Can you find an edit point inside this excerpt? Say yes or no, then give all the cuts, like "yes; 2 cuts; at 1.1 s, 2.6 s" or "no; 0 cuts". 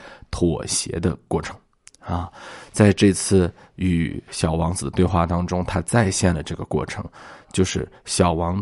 no; 0 cuts